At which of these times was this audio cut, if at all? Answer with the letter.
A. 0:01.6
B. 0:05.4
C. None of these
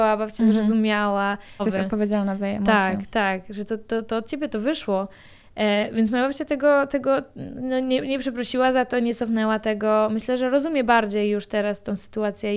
A